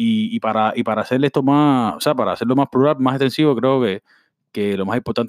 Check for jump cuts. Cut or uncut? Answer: uncut